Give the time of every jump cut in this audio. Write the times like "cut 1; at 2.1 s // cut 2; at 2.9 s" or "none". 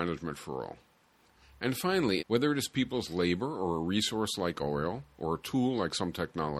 cut 1; at 2.2 s

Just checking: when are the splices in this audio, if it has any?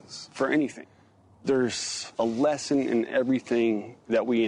none

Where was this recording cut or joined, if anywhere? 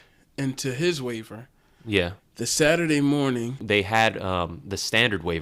cut 1; at 2.2 s // cut 2; at 3.6 s

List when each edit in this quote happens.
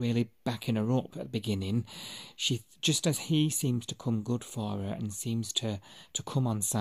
none

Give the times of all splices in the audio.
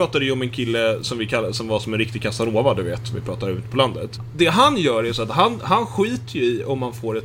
cut 1; at 1.0 s

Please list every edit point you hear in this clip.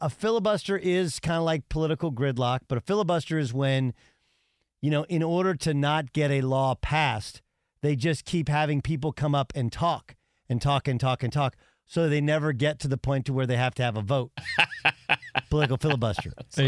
none

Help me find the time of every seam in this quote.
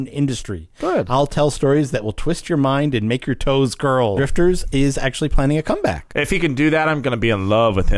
cut 1; at 4.2 s // cut 2; at 6.1 s

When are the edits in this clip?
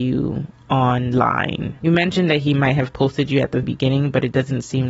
cut 1; at 1.8 s // cut 2; at 3.6 s

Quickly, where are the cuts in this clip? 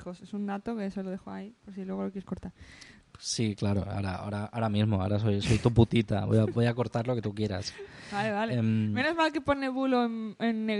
none

